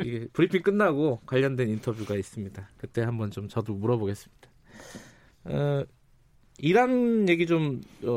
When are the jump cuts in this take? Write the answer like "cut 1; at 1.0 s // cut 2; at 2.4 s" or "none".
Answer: none